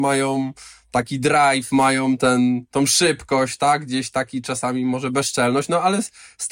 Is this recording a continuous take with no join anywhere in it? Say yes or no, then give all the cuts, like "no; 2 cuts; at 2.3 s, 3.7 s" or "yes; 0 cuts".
yes; 0 cuts